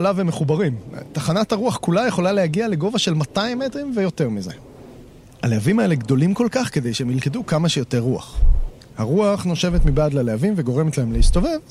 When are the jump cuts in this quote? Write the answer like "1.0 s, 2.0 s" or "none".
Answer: none